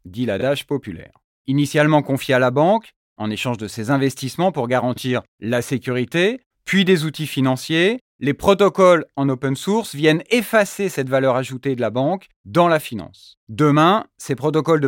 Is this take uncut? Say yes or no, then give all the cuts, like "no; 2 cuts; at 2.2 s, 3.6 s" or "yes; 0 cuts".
no; 2 cuts; at 1.4 s, 6.5 s